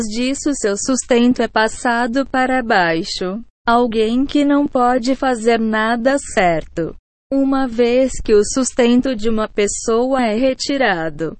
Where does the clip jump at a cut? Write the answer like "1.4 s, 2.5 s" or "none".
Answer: 3.5 s, 7.2 s